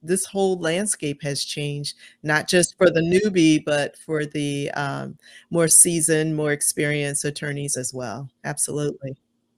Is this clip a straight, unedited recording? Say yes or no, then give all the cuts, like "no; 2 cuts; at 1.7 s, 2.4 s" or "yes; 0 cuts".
no; 1 cut; at 8.3 s